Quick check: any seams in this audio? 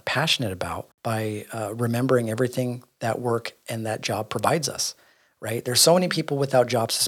no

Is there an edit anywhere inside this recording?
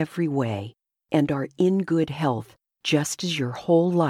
no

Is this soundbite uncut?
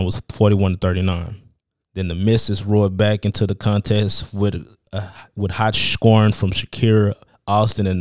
no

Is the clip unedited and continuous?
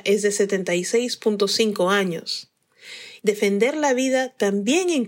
no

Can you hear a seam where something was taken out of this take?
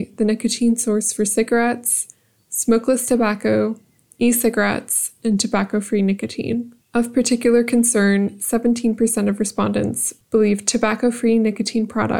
yes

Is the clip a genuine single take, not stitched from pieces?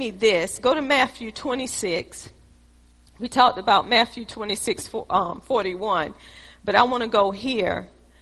yes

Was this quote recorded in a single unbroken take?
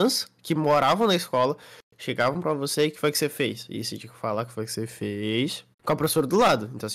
no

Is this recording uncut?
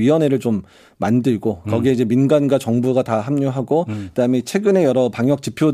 yes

